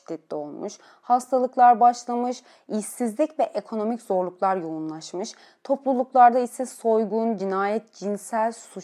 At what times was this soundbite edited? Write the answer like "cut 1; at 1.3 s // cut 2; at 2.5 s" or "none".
none